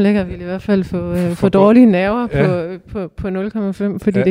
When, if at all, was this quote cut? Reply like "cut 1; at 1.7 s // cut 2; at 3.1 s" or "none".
none